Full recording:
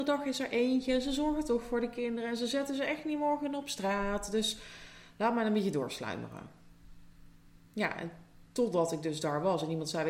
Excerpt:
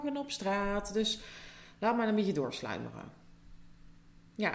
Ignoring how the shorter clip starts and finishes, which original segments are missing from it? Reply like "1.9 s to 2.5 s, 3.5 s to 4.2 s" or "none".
none

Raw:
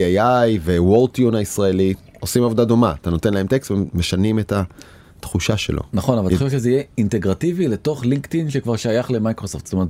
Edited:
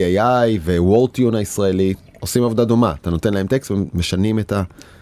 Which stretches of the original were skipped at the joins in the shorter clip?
none

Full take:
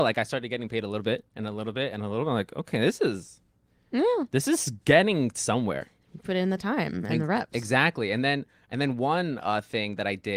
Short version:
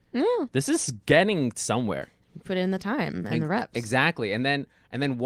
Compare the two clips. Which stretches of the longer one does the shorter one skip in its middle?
none

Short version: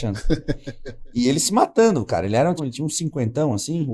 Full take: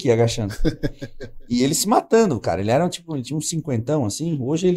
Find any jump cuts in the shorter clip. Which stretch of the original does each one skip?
2.9 s to 3.1 s

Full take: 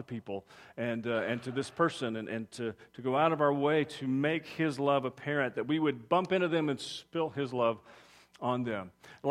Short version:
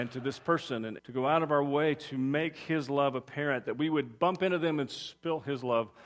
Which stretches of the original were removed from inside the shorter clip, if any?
2.3 s to 2.9 s

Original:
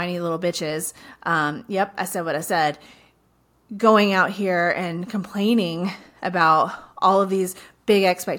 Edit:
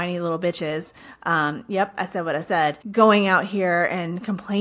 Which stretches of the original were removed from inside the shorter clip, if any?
2.8 s to 3.7 s

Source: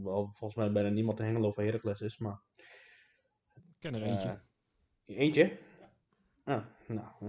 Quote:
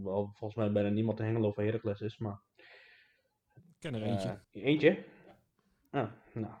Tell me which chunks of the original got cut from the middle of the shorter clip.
4.4 s to 5.0 s

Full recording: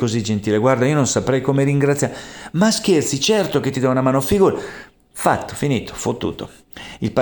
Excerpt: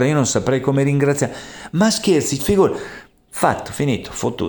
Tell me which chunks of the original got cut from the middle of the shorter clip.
3.2 s to 4.2 s

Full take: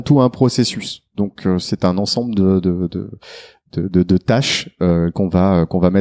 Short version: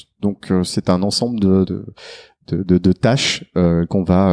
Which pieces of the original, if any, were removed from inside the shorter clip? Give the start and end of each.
2.6 s to 2.9 s

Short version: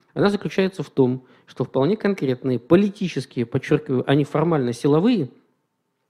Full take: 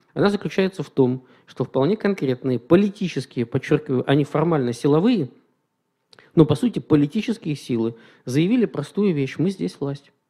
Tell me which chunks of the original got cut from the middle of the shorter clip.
none

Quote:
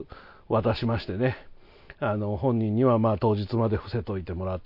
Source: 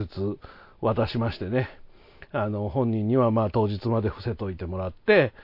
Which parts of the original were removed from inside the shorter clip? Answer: none

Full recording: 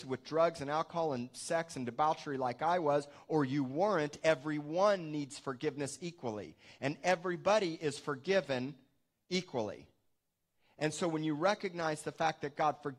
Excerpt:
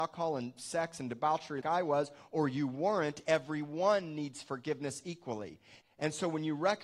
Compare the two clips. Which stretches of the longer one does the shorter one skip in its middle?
2.4 s to 2.6 s, 6.8 s to 10.6 s

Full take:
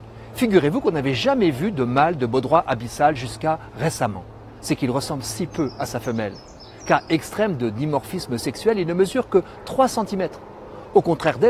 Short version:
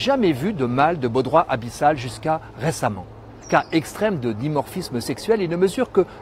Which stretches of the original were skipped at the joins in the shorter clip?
4.6 s to 6.8 s

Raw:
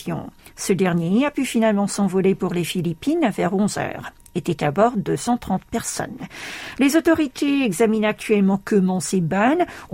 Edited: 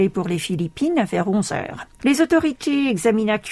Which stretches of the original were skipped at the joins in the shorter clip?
4.3 s to 6.7 s

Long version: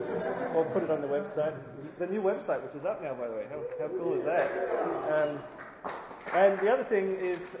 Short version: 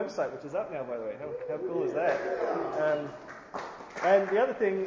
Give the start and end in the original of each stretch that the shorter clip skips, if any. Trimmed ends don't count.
none

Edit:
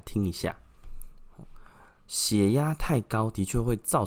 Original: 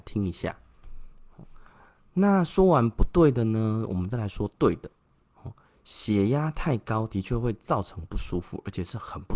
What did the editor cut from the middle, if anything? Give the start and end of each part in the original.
2.1 s to 5.8 s

